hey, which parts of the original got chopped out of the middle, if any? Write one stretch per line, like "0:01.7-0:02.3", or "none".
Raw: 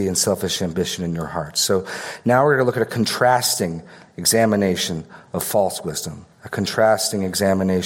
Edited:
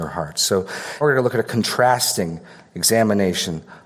0:02.2-0:02.4